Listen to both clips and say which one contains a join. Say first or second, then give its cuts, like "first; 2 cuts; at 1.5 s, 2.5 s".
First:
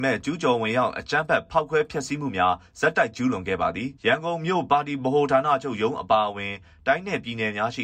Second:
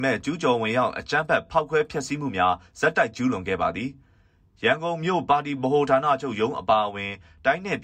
first; 1 cut; at 4.0 s